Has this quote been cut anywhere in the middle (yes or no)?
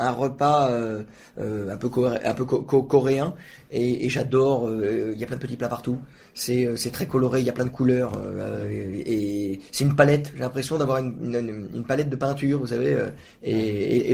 no